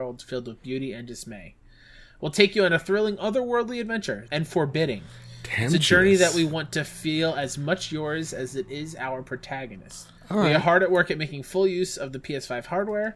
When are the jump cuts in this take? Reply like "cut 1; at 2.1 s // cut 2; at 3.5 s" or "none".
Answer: cut 1; at 4.3 s // cut 2; at 10.2 s